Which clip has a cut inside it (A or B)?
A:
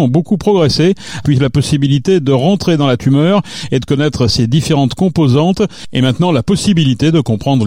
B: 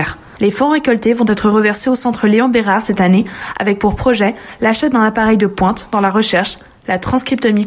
A